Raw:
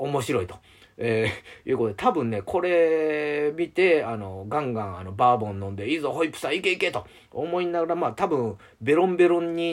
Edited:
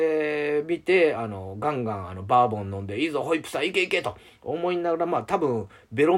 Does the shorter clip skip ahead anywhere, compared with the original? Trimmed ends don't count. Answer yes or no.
no